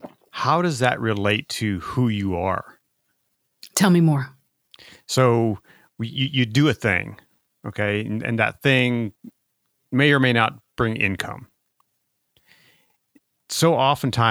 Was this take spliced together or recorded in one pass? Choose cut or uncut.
uncut